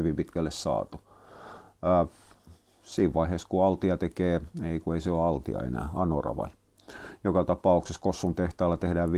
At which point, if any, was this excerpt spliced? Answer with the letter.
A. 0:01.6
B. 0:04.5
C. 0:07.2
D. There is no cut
D